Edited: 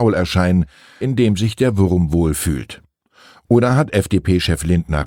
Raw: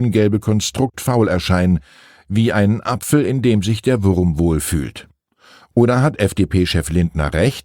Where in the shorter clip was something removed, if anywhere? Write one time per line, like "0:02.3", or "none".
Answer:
0:01.0

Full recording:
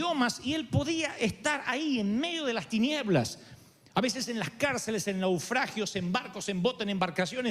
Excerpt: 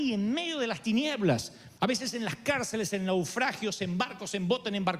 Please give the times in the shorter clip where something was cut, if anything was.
0:01.7

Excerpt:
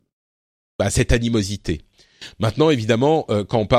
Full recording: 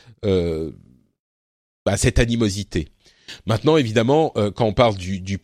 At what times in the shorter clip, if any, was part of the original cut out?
none

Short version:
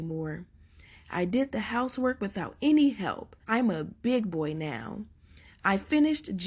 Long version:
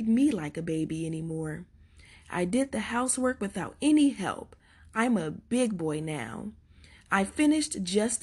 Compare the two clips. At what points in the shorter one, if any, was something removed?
0:03.4

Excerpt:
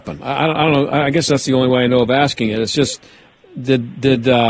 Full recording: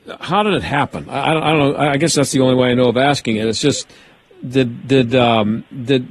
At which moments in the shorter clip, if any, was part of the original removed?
none

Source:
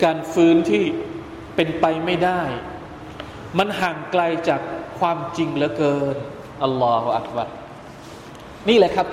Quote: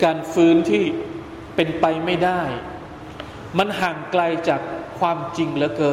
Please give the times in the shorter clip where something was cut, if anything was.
none

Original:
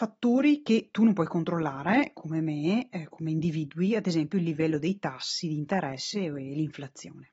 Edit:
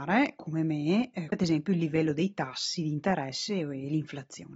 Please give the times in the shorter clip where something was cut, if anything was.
0:01.3

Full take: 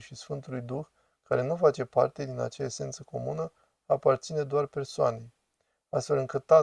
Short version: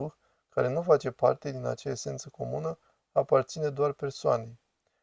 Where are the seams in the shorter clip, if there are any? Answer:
none

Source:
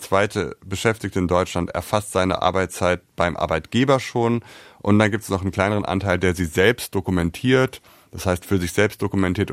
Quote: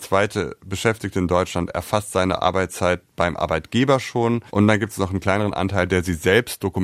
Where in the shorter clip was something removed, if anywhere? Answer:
0:04.5

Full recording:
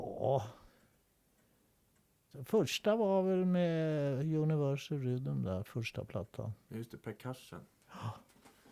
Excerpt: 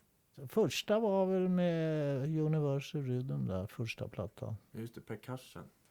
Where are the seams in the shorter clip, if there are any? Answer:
none

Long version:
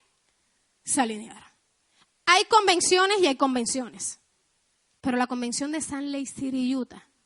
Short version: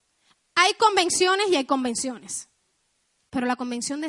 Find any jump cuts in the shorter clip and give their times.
none

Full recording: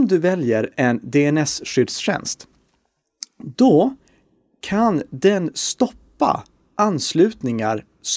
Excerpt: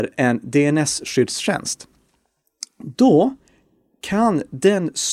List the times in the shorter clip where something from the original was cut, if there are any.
none

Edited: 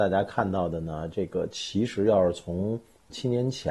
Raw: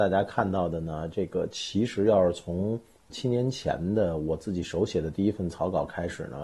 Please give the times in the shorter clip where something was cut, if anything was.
none

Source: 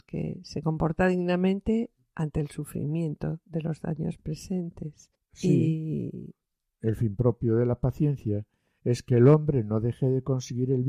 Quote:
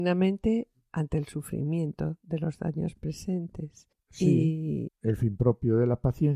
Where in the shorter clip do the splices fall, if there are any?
0:04.9

